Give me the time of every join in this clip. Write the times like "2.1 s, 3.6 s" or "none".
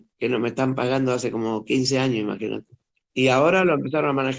3.0 s